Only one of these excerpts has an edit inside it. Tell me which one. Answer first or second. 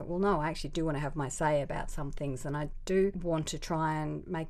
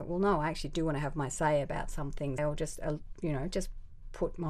second